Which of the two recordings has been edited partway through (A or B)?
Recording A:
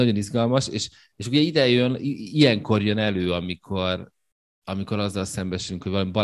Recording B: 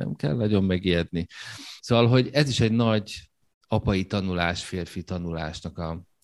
B